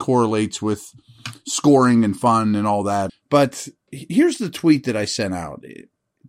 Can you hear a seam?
yes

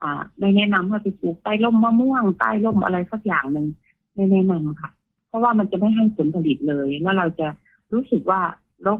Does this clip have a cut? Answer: no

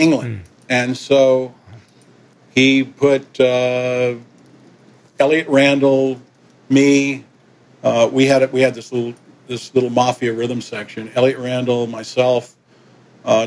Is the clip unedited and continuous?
yes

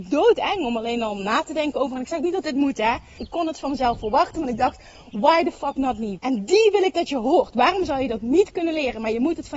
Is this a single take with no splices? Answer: no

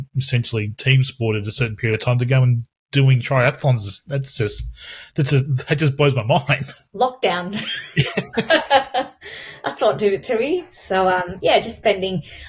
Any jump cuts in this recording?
no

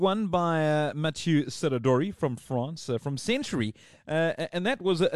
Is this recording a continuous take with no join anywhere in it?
yes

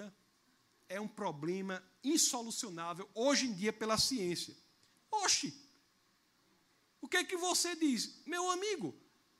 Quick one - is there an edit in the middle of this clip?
yes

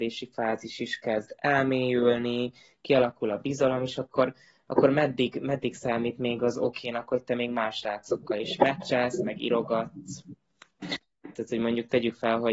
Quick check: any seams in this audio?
yes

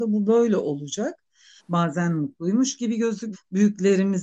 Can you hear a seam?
yes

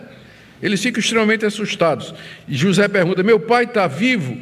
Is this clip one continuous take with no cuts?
yes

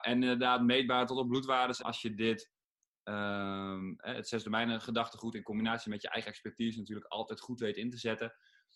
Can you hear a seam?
yes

